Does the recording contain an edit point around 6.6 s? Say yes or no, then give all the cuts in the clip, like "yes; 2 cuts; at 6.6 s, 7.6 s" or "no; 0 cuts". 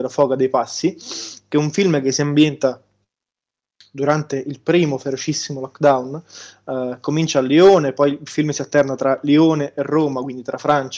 no; 0 cuts